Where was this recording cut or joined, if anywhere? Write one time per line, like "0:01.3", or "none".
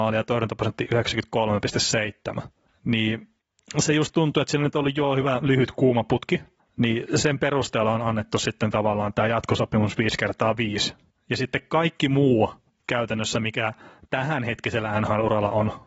none